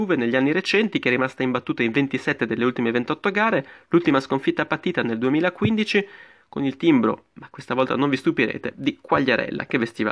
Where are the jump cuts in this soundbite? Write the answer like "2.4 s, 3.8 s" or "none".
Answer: 8.7 s